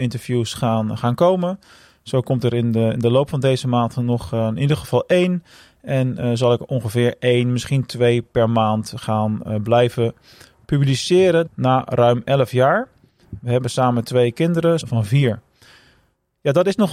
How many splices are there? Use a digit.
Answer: 2